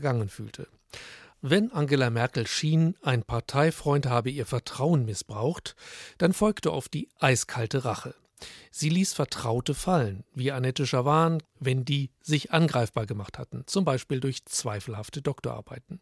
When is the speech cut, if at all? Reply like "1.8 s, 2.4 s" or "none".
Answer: 1.3 s, 11.4 s